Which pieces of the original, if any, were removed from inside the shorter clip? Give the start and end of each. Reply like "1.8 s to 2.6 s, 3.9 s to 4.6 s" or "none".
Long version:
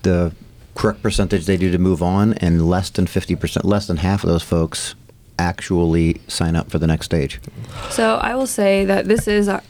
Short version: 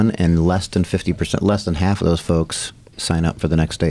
5.2 s to 6.2 s